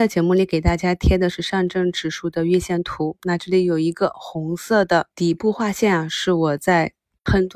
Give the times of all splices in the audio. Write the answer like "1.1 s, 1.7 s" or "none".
5.1 s